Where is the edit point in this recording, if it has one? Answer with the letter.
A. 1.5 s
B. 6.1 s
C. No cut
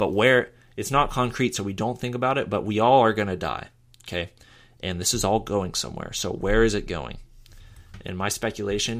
C